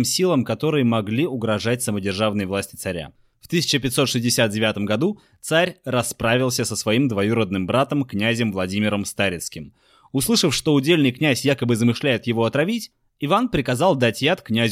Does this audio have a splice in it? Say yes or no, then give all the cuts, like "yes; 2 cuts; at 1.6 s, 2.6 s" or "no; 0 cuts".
no; 0 cuts